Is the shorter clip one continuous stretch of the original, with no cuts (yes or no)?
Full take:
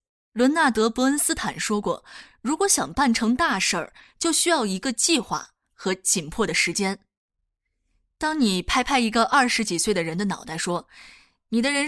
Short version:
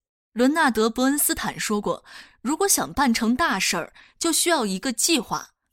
yes